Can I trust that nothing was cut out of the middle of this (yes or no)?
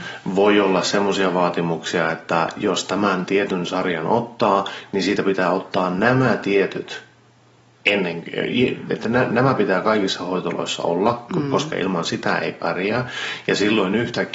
yes